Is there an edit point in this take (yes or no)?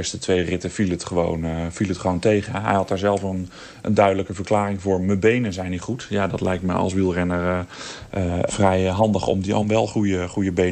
yes